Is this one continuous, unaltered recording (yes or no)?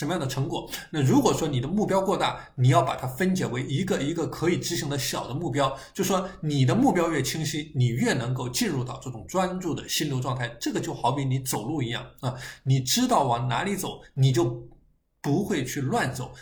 yes